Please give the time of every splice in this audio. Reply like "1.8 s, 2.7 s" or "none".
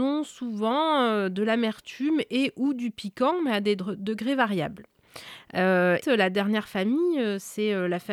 6.0 s